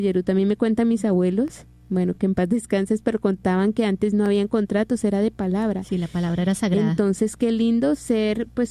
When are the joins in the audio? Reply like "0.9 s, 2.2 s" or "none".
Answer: none